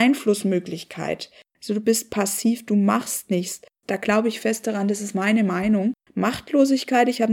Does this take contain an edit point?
yes; 3 cuts; at 1.5 s, 3.8 s, 6.1 s

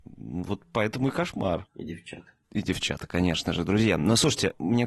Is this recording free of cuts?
no; 1 cut; at 1.7 s

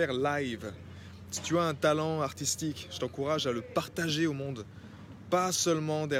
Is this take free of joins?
yes; 0 cuts

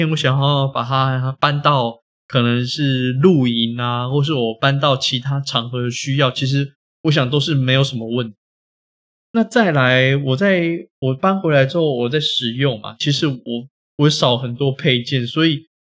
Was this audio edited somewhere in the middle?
no; 0 cuts

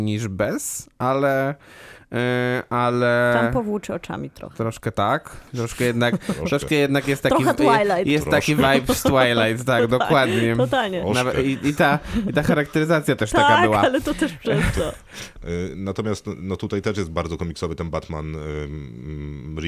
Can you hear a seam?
yes; 1 cut; at 15.4 s

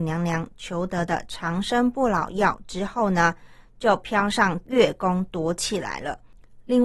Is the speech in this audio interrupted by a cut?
no; 0 cuts

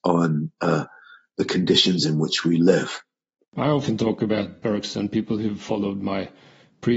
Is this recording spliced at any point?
no; 0 cuts

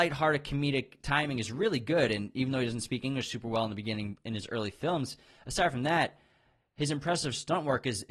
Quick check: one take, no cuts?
yes; 0 cuts

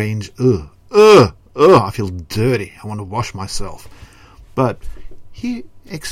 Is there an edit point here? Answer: no; 0 cuts

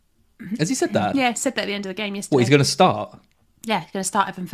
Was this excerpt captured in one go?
no; 1 cut; at 1.1 s

